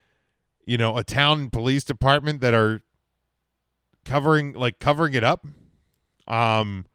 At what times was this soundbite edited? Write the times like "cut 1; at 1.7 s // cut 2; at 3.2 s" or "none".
none